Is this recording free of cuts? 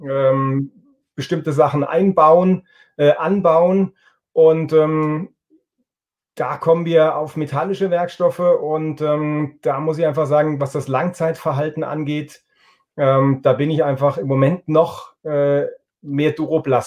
yes; 0 cuts

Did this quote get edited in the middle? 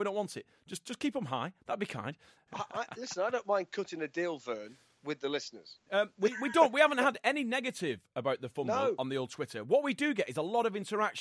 yes; 1 cut; at 5.9 s

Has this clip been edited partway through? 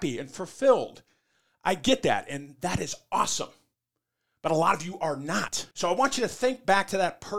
yes; 1 cut; at 5.7 s

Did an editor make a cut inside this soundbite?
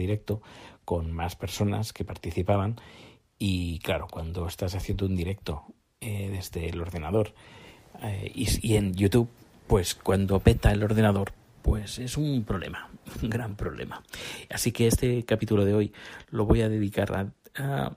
no; 0 cuts

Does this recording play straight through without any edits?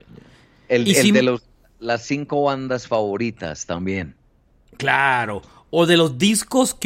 yes; 0 cuts

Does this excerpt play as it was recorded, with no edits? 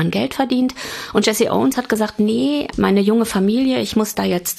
no; 1 cut; at 2.7 s

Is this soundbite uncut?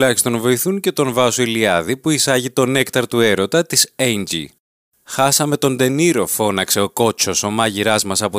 yes; 0 cuts

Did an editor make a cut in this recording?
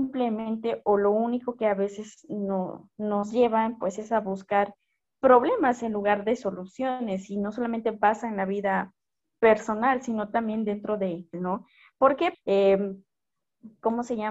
yes; 2 cuts; at 11.3 s, 12.3 s

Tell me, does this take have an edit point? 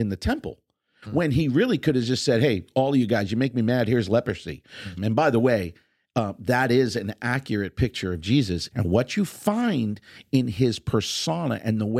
yes; 2 cuts; at 5.0 s, 8.7 s

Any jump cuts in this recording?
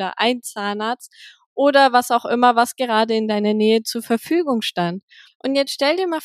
yes; 1 cut; at 5.3 s

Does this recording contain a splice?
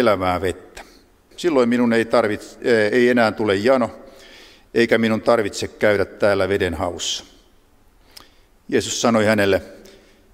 yes; 1 cut; at 1.3 s

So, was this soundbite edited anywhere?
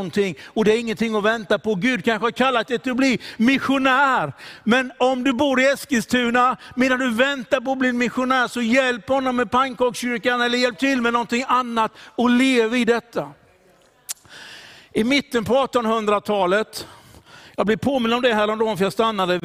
no; 0 cuts

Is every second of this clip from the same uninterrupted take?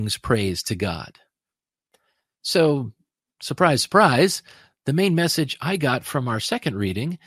yes; 0 cuts

